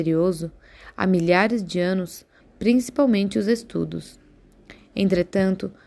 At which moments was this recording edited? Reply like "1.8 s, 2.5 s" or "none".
2.4 s